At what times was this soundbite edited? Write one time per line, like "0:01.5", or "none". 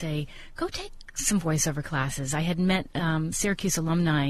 0:03.3

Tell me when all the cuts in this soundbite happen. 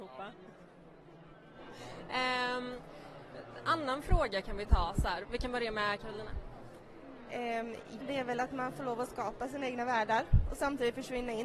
0:05.2
0:08.0

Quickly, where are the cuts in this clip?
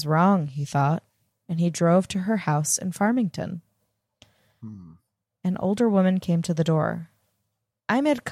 none

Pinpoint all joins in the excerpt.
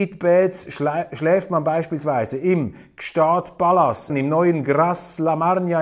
0:04.1

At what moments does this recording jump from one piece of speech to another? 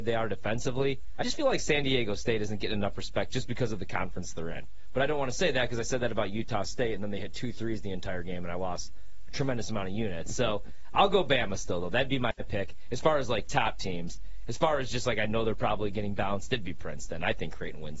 none

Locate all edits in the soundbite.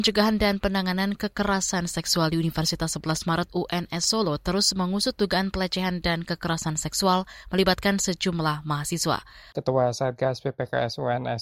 0:09.5

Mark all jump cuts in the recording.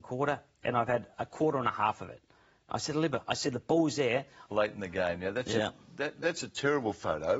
0:04.5

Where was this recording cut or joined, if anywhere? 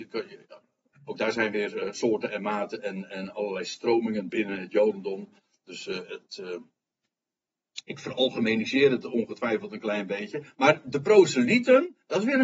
none

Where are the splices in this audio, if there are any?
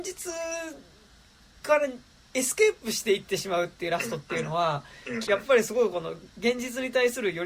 0:05.2

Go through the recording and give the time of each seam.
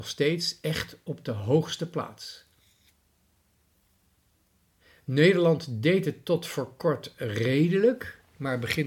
none

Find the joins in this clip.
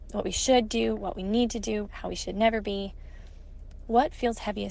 0:01.9

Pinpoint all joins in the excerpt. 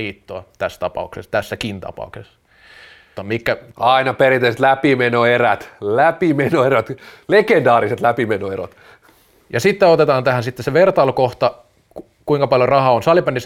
0:03.2

